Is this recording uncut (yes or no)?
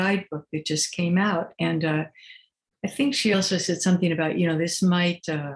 yes